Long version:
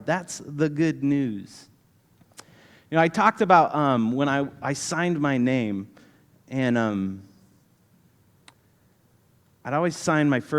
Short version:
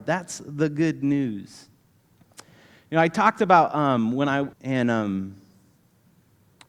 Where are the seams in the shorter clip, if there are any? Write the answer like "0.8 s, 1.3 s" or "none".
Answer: 4.5 s